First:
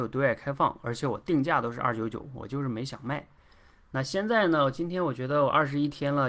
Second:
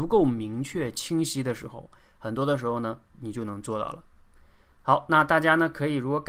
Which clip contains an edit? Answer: second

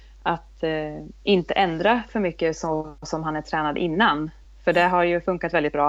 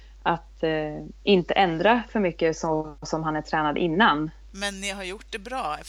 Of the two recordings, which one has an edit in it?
second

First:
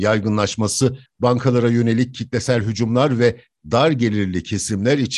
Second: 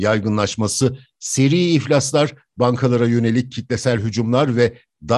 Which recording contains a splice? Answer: first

